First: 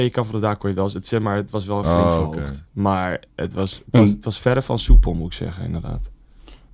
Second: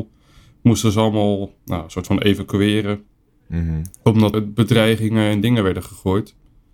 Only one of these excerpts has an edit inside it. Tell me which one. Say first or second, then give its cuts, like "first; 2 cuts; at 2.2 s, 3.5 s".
second; 1 cut; at 4.3 s